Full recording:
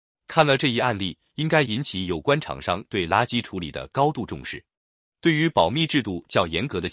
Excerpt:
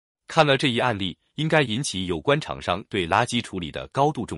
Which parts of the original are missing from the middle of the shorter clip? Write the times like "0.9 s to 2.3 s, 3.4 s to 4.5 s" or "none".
none